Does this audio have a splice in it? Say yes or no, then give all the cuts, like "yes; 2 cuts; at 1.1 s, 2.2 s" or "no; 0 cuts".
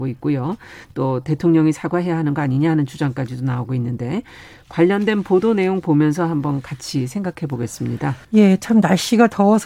yes; 1 cut; at 8.2 s